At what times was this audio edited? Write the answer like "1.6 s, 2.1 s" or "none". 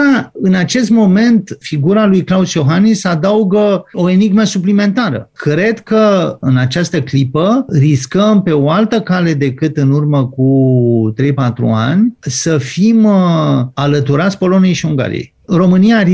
none